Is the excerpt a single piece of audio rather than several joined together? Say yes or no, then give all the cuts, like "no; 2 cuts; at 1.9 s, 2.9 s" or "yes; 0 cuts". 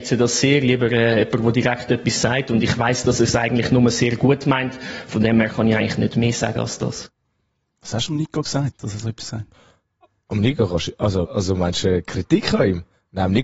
no; 2 cuts; at 8.7 s, 11.3 s